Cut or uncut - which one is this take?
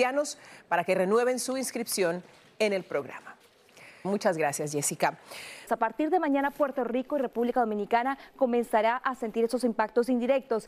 cut